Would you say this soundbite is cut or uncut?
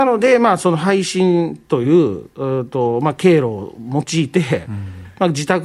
uncut